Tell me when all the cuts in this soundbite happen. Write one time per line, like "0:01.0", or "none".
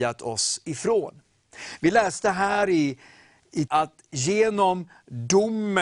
0:03.7